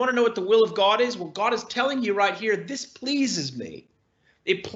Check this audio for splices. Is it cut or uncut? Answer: uncut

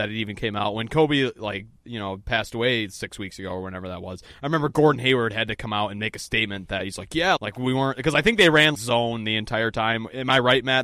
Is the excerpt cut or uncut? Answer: cut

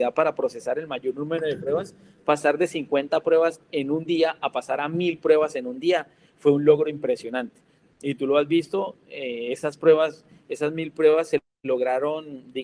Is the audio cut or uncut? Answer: uncut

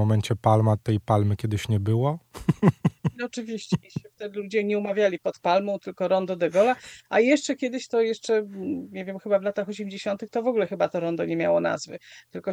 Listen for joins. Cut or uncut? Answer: uncut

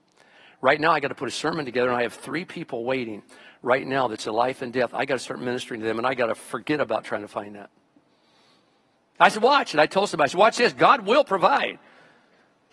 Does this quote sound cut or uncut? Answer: uncut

